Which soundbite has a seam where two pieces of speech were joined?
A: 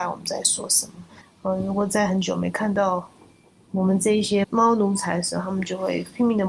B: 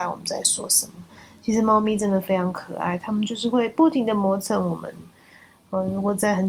A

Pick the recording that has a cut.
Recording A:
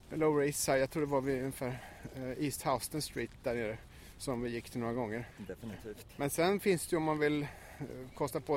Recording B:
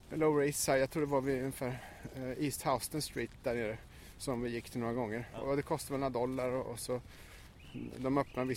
A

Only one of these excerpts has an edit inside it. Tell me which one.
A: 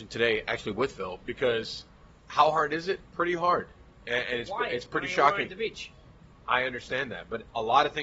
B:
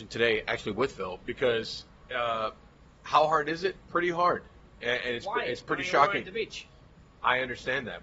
A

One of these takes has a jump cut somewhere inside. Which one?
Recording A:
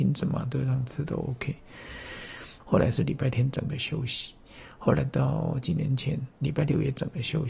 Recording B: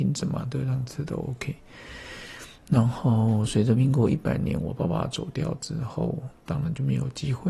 A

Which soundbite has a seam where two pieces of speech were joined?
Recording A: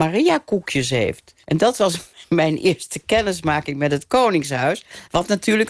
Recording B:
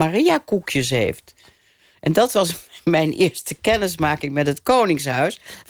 A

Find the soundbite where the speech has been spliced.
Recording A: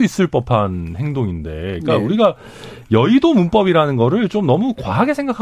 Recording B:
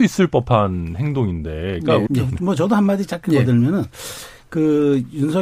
B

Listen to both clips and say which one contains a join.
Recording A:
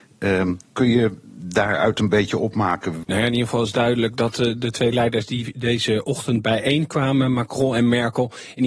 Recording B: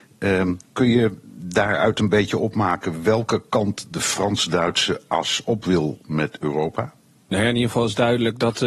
A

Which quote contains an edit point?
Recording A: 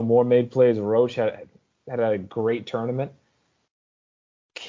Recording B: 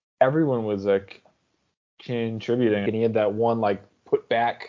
B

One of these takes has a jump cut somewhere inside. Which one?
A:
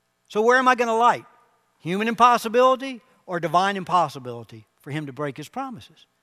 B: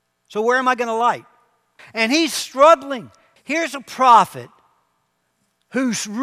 B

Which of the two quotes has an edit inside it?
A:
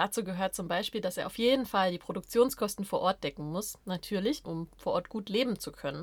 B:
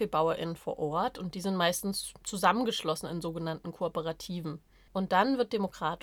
A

